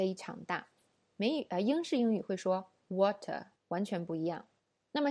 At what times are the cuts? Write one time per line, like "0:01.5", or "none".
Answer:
0:01.2
0:03.6